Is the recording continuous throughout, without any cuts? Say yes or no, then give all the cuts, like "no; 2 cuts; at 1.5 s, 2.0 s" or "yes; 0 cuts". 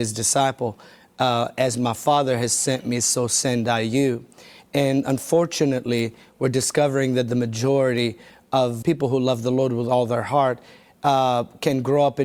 no; 2 cuts; at 4.6 s, 8.8 s